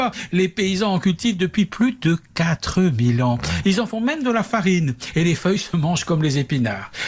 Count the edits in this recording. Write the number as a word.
zero